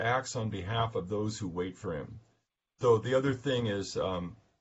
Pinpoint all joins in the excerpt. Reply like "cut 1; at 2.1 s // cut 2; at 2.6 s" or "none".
cut 1; at 2.7 s